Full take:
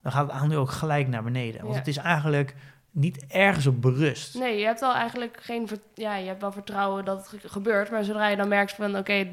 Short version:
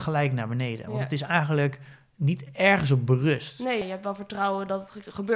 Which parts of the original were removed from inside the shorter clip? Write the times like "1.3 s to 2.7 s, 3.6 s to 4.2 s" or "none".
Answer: 4.6 s to 6.2 s